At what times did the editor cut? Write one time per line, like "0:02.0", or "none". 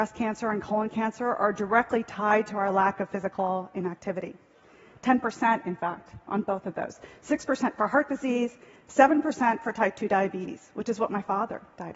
none